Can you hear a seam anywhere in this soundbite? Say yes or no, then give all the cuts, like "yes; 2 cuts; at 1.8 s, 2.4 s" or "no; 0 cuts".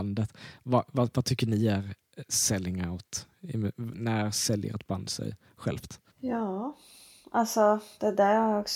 yes; 1 cut; at 6.1 s